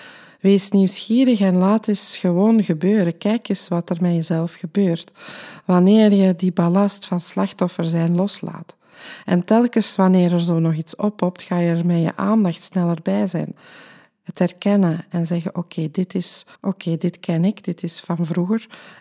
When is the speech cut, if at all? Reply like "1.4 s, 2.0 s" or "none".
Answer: 16.6 s